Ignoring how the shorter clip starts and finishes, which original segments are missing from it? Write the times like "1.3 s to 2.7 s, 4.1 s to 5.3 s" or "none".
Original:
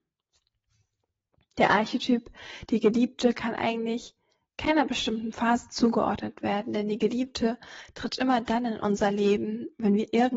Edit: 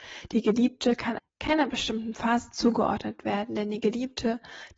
3.6 s to 4.4 s